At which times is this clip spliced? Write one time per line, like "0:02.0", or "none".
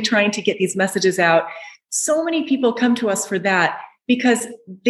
0:01.8